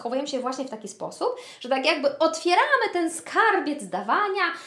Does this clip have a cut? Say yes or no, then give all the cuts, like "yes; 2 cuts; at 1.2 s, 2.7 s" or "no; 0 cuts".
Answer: no; 0 cuts